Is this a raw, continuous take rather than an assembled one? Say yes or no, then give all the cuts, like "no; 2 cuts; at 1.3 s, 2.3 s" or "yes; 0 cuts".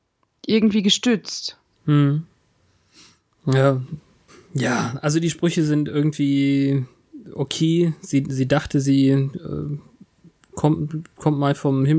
yes; 0 cuts